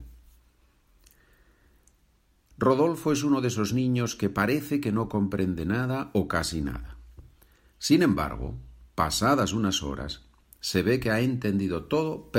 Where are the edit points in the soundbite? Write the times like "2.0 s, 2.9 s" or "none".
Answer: none